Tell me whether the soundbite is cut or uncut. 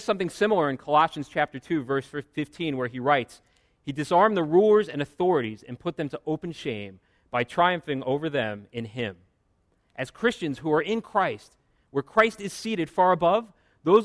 uncut